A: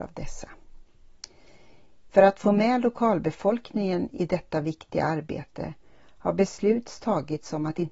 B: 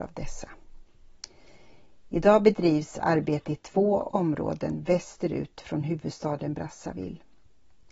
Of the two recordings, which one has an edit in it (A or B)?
A